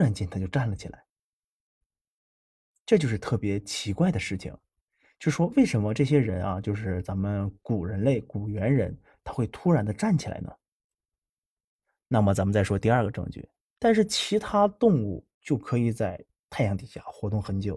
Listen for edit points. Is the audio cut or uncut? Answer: cut